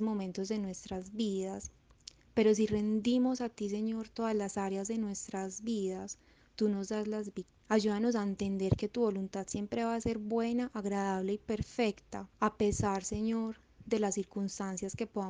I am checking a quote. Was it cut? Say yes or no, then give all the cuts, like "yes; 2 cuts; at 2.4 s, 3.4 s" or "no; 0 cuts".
yes; 2 cuts; at 7.6 s, 12.3 s